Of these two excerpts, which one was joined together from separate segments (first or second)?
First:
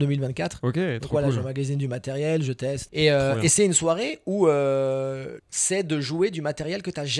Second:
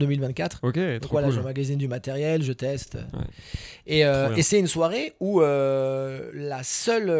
first